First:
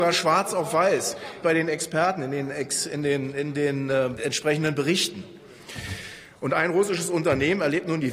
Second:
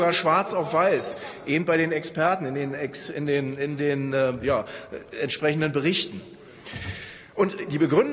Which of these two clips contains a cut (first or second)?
first